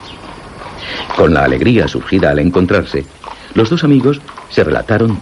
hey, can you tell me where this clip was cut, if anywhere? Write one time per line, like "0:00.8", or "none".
0:01.1